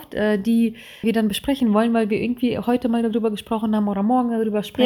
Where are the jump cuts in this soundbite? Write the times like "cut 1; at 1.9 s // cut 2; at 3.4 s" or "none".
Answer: cut 1; at 1.0 s